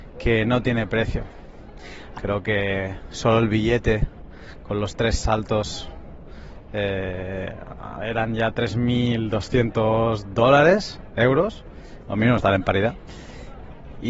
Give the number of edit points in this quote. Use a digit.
1